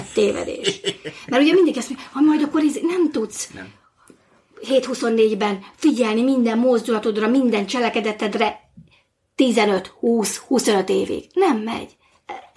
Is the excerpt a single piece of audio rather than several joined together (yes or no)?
yes